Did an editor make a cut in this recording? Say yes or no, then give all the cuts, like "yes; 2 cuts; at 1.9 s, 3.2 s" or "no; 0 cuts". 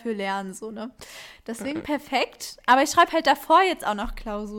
no; 0 cuts